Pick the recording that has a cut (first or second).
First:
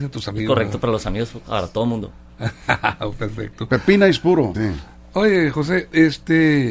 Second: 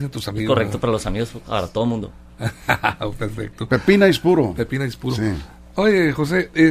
first